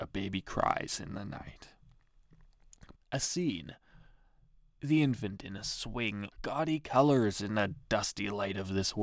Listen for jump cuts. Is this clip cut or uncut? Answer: cut